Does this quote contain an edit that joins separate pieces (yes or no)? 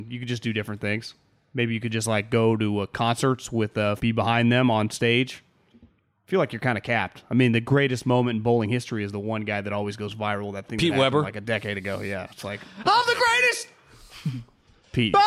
yes